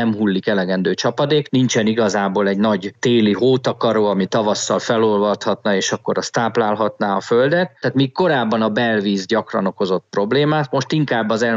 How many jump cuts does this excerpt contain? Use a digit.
1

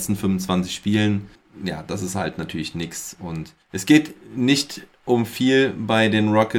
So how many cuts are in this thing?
0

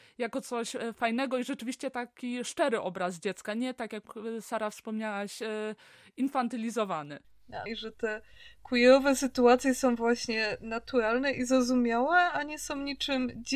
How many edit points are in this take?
1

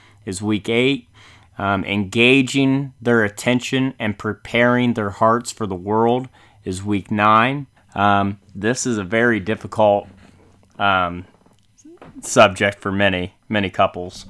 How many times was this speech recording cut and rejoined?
1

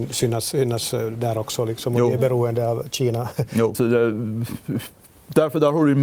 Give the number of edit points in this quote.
1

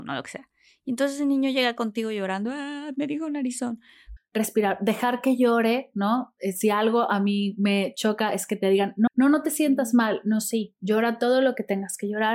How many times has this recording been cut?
2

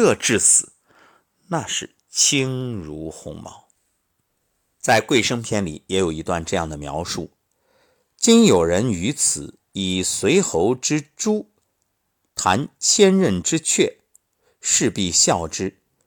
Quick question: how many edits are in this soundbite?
0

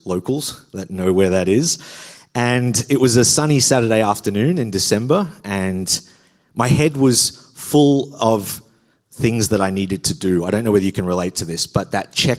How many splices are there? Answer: 1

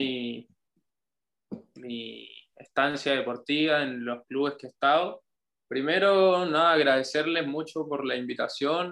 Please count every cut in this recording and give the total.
1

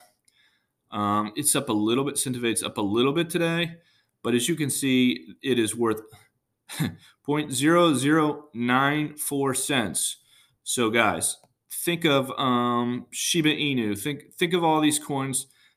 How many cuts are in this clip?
0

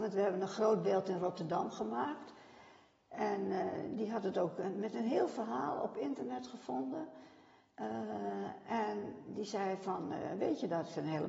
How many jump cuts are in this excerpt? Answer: 0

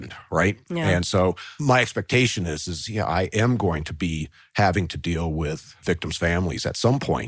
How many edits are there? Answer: 0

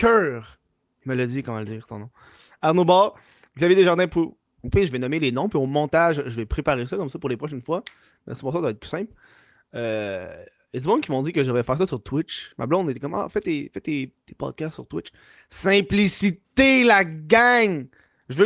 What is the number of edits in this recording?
1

